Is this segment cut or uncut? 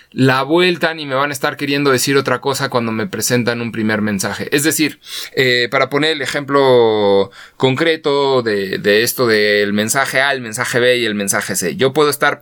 uncut